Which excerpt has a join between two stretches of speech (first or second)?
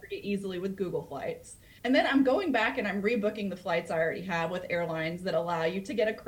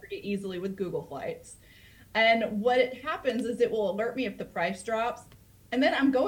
first